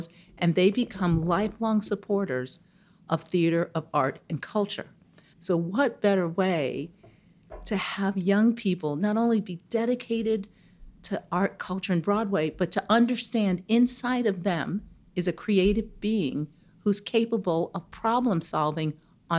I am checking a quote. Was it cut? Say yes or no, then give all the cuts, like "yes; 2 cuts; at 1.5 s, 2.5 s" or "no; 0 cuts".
yes; 1 cut; at 5.3 s